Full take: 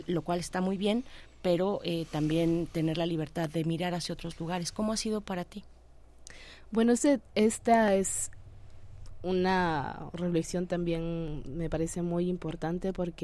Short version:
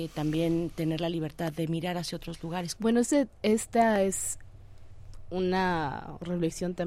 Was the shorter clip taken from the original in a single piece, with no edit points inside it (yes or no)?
no